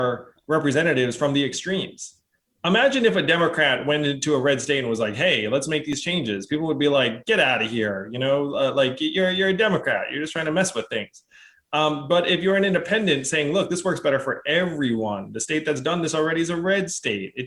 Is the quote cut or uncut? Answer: uncut